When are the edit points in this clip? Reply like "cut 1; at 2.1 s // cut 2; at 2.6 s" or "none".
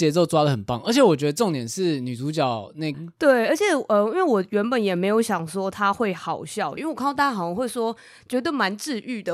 cut 1; at 2.9 s // cut 2; at 6.8 s